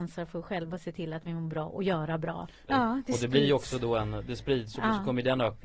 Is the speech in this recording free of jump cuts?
no; 1 cut; at 2.7 s

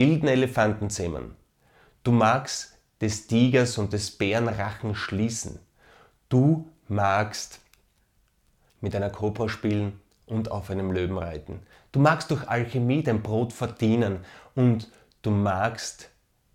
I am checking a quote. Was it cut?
no; 0 cuts

